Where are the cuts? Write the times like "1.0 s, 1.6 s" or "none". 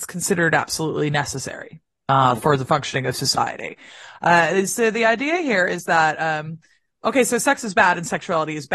none